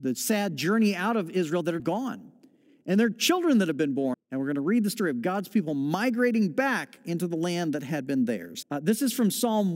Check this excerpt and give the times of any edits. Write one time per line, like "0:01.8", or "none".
0:01.8
0:04.1
0:08.6